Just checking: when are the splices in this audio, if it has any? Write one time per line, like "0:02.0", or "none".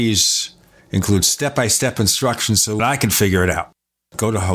0:02.8